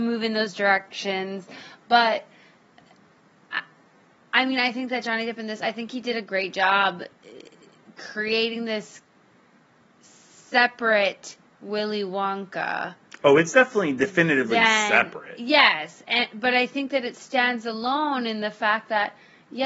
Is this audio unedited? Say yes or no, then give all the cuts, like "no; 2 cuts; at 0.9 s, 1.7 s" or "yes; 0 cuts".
yes; 0 cuts